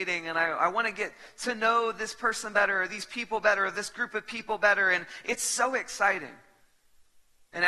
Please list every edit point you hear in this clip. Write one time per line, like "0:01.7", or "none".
none